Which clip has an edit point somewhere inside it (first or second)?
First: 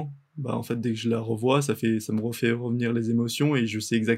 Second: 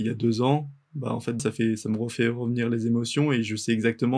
second